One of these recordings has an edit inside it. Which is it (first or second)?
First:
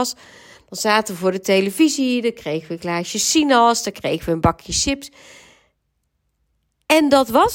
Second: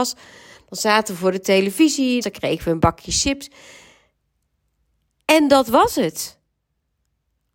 second